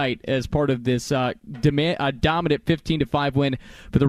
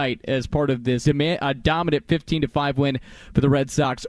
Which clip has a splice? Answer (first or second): second